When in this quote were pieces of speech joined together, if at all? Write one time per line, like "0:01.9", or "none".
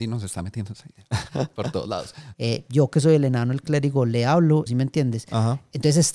0:02.3
0:04.7